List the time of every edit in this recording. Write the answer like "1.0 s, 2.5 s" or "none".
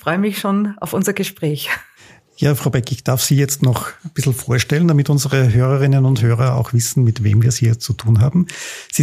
none